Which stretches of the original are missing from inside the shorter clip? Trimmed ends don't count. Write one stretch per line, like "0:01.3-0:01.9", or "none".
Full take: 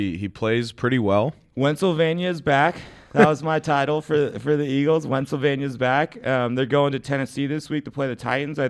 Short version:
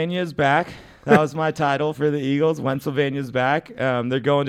0:04.0-0:04.4